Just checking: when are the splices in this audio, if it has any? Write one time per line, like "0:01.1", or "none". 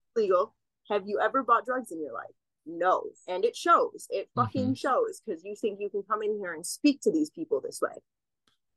none